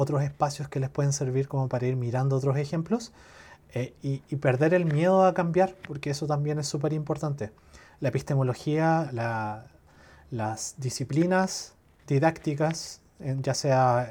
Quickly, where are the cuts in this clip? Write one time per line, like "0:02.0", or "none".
0:09.1